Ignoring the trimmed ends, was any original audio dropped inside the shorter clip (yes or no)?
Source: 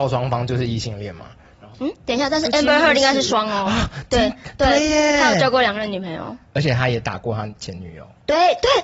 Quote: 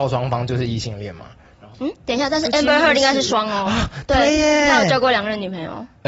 yes